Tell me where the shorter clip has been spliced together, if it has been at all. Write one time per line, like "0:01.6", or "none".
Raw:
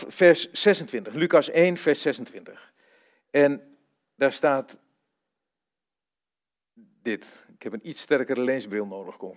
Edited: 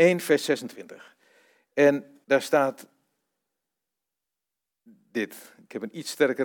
0:02.2

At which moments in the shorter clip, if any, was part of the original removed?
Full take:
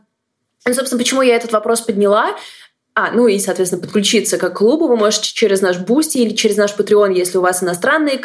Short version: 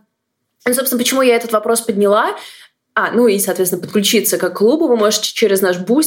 none

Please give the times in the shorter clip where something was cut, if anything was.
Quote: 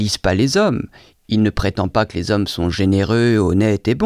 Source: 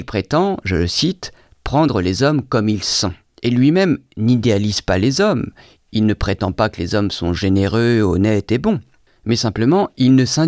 none

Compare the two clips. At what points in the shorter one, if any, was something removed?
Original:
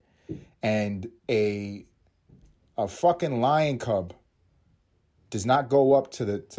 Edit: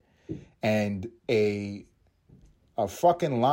none

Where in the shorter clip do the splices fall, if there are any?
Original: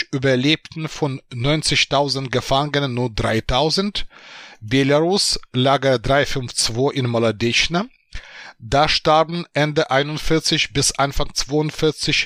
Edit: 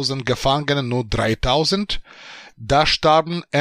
0:02.5

